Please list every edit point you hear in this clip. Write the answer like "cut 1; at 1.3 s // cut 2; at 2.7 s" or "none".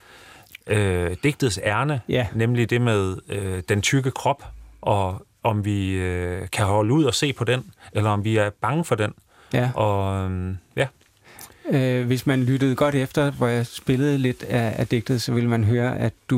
none